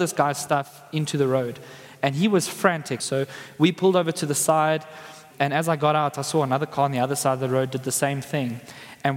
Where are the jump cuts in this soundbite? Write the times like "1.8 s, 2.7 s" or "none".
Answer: 3.0 s, 5.3 s